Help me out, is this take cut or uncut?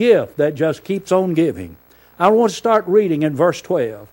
uncut